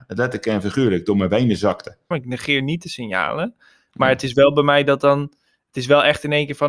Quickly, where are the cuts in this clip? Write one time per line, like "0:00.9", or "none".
0:02.1